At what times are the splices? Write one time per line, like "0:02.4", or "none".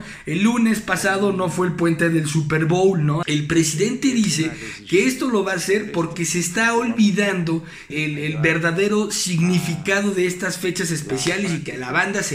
0:03.2
0:07.9